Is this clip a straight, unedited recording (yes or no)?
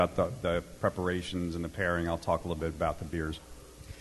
yes